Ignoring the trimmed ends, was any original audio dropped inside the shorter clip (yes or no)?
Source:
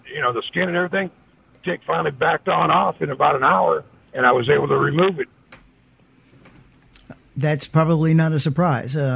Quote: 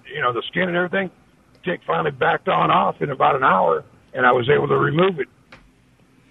no